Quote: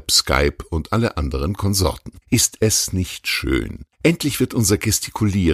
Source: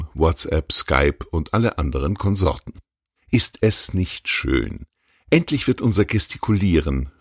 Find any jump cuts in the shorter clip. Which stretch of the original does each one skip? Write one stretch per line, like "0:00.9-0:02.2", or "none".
0:02.8-0:03.2
0:04.9-0:05.2

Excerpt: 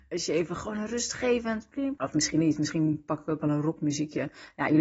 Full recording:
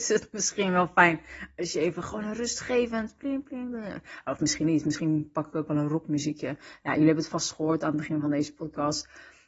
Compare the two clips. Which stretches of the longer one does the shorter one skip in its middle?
0:03.4-0:04.2

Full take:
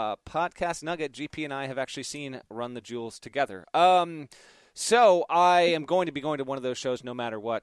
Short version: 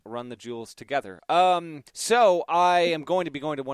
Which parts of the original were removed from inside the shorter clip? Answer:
0:04.3-0:04.7

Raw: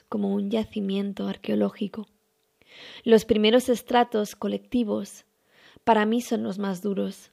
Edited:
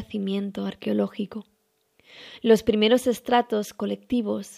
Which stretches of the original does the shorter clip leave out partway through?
none

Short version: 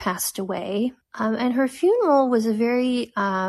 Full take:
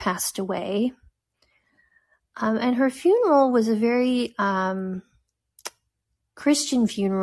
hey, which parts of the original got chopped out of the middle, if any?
0:01.0-0:02.2

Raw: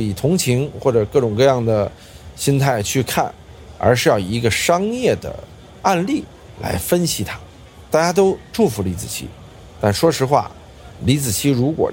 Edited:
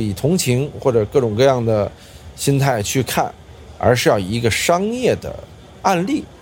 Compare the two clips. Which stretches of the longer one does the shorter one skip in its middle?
none

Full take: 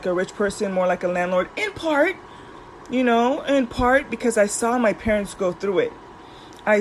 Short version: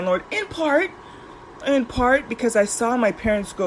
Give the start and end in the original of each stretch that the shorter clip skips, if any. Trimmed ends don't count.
0:02.9-0:03.4

